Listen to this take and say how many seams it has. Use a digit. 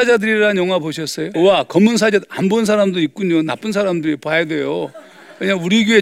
1